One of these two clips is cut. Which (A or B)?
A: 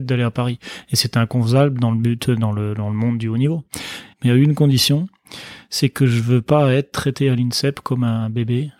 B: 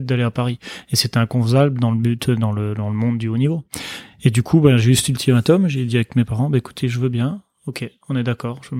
A